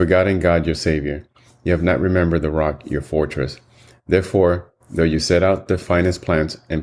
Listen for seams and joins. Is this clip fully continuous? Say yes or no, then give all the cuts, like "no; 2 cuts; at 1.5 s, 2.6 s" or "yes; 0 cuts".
yes; 0 cuts